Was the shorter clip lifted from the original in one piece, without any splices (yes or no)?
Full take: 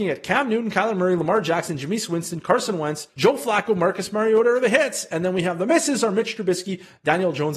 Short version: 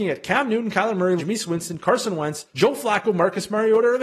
no